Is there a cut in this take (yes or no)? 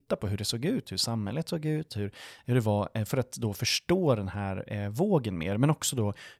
no